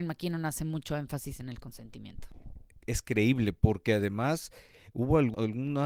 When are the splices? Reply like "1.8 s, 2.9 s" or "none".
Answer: 2.8 s